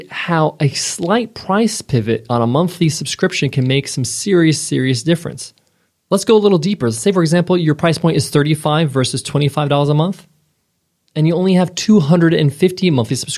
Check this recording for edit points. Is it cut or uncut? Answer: uncut